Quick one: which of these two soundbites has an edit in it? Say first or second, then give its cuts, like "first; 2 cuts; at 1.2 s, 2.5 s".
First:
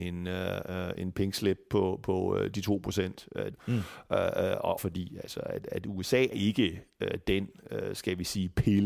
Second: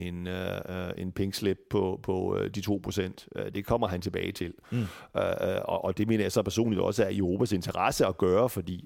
first; 3 cuts; at 3.5 s, 4.8 s, 6.3 s